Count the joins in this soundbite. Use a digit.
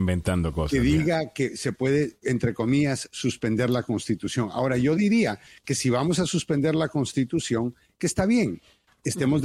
0